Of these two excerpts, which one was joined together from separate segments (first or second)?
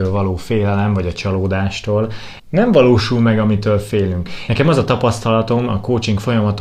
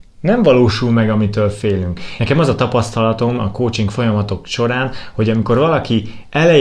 first